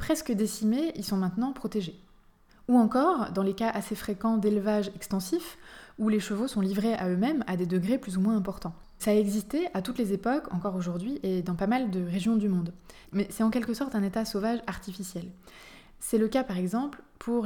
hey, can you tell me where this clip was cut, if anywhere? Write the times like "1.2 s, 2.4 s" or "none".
9.0 s, 13.0 s